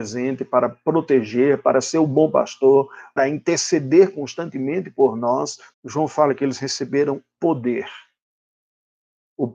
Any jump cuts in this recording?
yes; 3 cuts; at 3.2 s, 5.7 s, 7.4 s

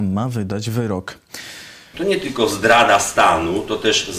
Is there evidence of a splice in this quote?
yes; 1 cut; at 1.9 s

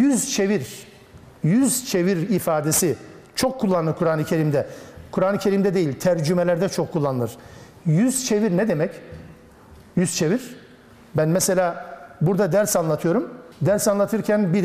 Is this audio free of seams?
no; 1 cut; at 13.5 s

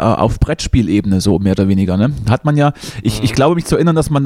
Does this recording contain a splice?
no; 0 cuts

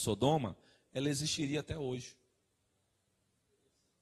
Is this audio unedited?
yes; 0 cuts

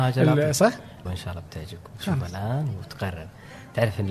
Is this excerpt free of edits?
no; 1 cut; at 1.1 s

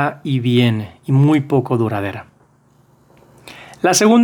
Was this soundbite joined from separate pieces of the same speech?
no; 0 cuts

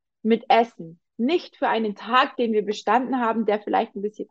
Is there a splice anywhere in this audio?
no; 0 cuts

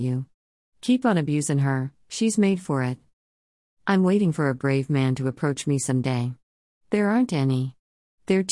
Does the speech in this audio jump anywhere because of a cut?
no; 0 cuts

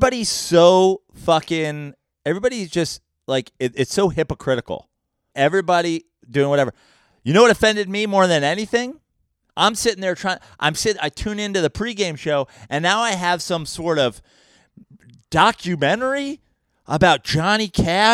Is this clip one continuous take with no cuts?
no; 2 cuts; at 5.3 s, 9.5 s

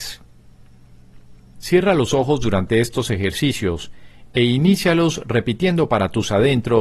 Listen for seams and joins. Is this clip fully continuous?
no; 1 cut; at 1.6 s

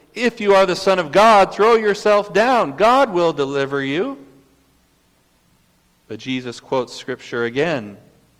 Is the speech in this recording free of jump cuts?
yes; 0 cuts

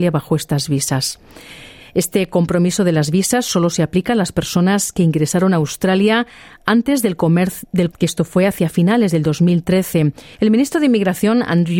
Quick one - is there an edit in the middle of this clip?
yes; 3 cuts; at 1.8 s, 7.9 s, 10.3 s

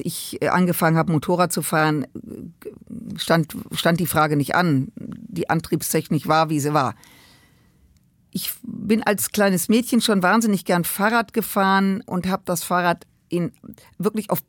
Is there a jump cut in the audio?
no; 0 cuts

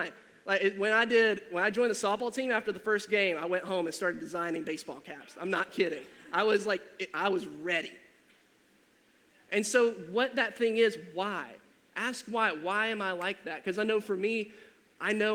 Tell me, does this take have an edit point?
no; 0 cuts

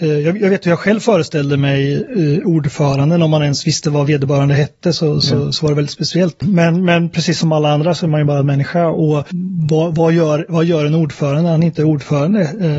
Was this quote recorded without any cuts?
yes; 0 cuts

